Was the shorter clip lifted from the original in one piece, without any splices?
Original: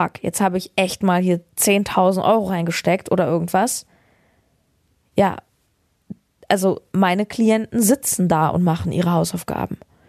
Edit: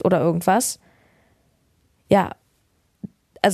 yes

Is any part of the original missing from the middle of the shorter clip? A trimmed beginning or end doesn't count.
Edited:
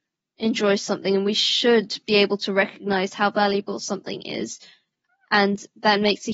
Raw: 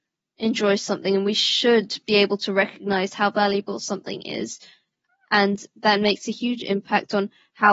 no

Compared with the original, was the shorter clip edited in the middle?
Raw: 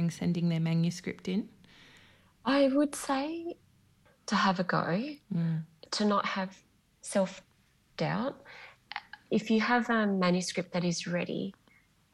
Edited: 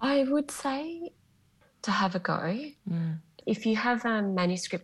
yes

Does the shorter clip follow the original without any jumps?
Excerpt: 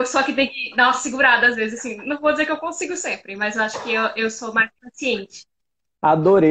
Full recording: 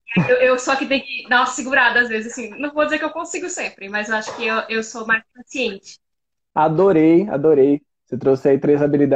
yes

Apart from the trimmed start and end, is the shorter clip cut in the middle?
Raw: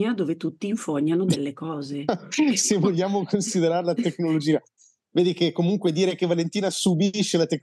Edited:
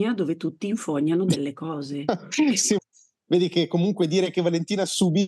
yes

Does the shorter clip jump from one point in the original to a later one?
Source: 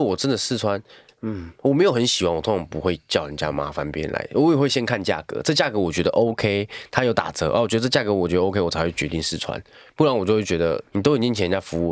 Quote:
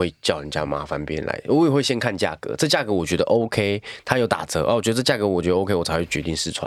no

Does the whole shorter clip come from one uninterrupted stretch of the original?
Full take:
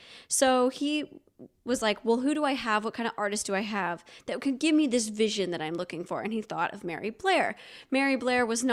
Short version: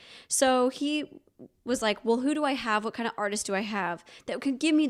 yes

